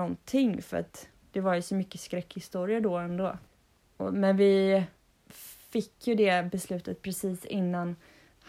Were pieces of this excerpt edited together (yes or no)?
no